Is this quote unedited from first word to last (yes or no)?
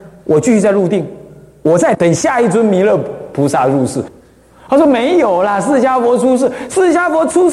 no